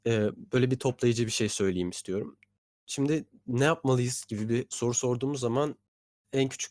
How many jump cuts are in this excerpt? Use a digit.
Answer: 0